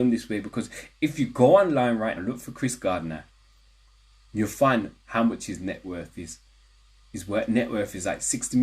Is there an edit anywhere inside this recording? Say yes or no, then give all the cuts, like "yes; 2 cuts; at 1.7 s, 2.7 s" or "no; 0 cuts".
yes; 1 cut; at 2.2 s